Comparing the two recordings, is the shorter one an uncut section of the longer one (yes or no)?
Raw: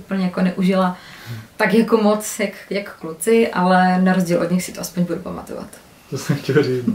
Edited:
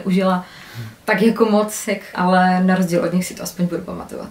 no